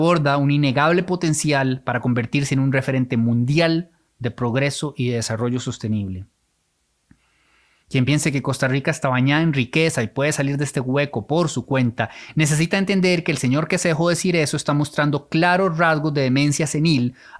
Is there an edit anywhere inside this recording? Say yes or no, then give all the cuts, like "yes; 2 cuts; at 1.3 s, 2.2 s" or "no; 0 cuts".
yes; 1 cut; at 7.8 s